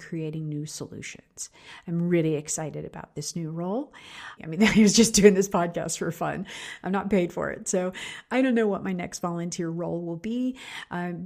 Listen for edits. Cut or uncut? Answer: cut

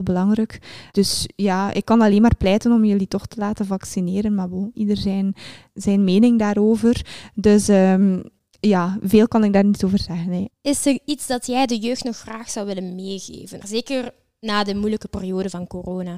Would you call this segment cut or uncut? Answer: cut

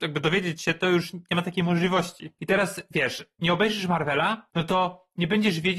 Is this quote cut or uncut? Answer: cut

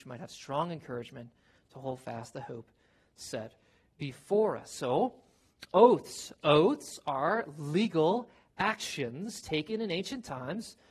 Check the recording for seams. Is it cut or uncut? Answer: uncut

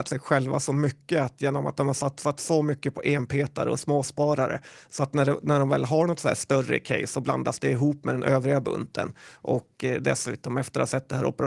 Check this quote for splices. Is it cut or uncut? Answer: uncut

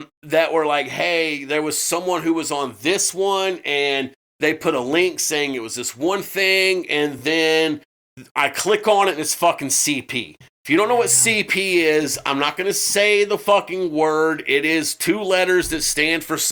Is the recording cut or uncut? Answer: uncut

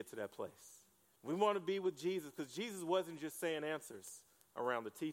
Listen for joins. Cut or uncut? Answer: cut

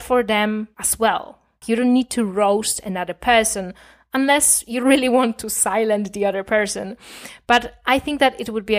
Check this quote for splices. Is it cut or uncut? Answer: cut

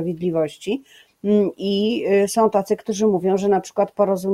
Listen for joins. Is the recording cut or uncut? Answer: uncut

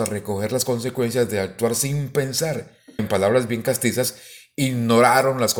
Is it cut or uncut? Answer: cut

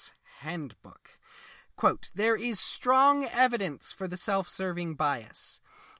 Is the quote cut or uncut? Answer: uncut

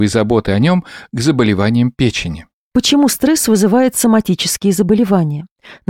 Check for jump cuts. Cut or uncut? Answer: uncut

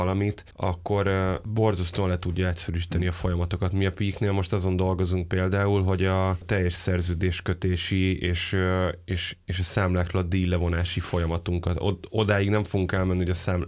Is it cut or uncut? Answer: uncut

